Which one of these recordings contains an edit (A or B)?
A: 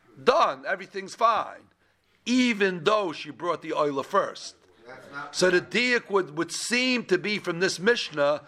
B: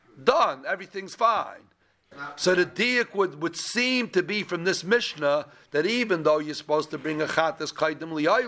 B